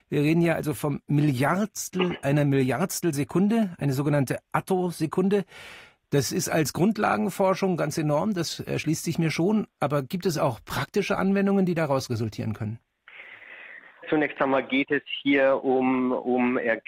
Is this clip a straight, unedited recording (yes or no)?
no